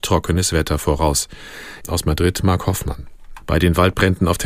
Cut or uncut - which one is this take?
cut